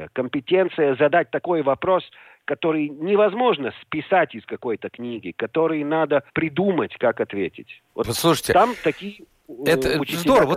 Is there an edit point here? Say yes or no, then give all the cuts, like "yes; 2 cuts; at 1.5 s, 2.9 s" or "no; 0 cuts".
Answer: yes; 1 cut; at 6.3 s